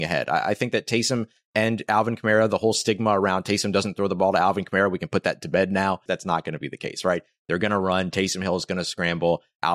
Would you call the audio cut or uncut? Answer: cut